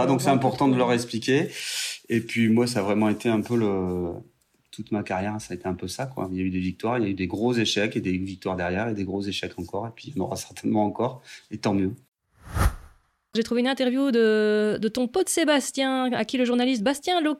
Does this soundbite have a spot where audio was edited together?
no; 0 cuts

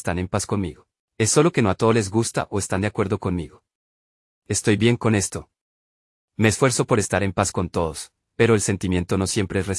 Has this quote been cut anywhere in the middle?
yes; 1 cut; at 1.0 s

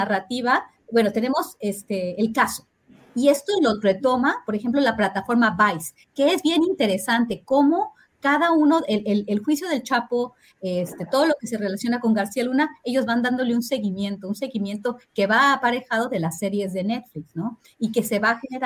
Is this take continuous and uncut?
yes; 0 cuts

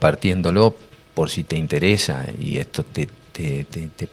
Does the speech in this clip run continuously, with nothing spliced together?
yes; 0 cuts

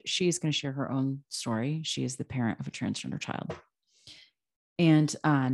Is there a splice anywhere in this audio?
no; 0 cuts

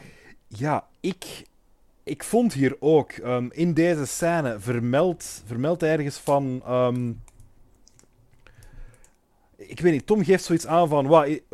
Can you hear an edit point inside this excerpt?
no; 0 cuts

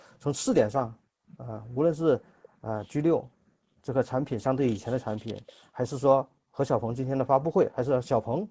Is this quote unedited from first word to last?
yes; 0 cuts

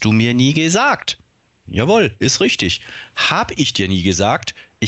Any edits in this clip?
yes; 1 cut; at 1.7 s

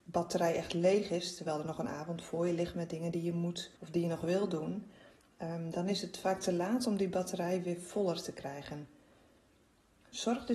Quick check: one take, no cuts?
no; 1 cut; at 3.8 s

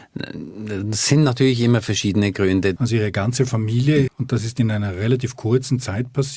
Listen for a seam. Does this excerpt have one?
yes; 2 cuts; at 2.8 s, 4.1 s

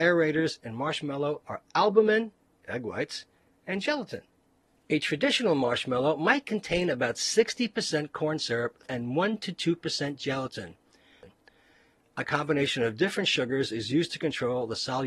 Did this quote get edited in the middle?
yes; 1 cut; at 8.9 s

